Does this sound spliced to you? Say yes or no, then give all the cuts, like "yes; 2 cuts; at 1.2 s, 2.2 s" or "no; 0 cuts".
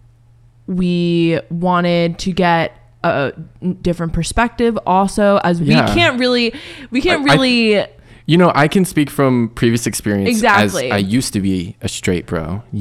no; 0 cuts